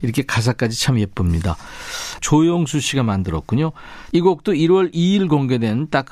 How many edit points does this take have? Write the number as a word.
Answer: two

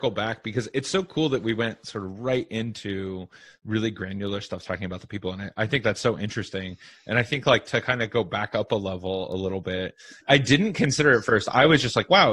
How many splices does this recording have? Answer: one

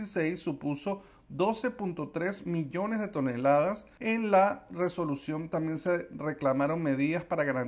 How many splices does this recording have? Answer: zero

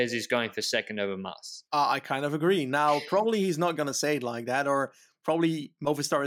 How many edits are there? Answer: one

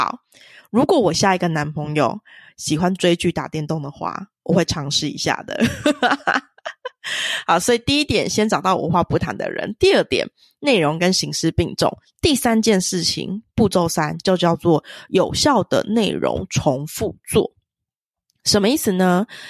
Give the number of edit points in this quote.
zero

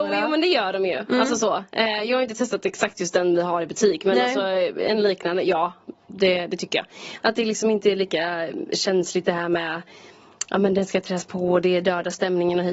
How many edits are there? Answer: one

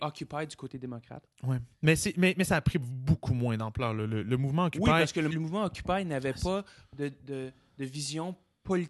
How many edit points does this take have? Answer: one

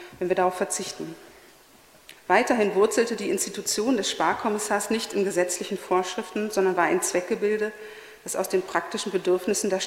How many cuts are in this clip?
one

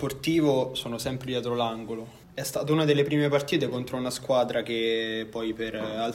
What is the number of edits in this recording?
one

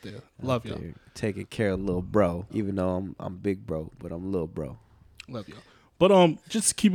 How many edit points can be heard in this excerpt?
one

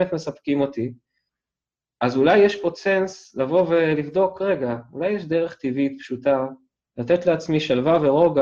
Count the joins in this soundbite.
one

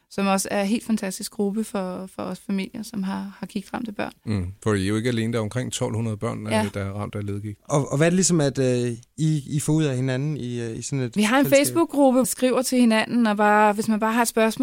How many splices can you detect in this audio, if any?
three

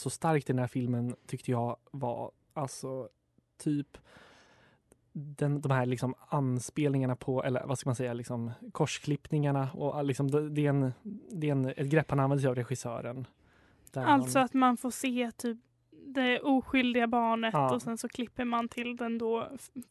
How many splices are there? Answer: zero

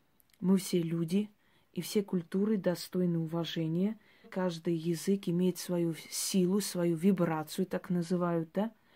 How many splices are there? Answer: one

